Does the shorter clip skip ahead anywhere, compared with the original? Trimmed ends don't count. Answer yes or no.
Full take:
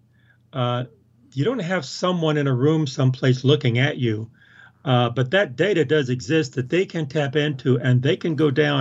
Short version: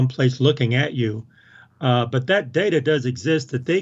no